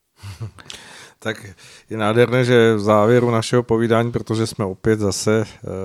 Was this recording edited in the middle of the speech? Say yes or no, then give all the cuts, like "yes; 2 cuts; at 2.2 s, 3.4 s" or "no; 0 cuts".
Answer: no; 0 cuts